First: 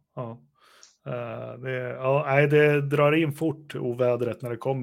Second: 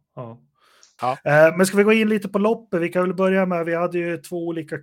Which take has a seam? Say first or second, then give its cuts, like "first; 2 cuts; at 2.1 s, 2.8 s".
second; 1 cut; at 1.0 s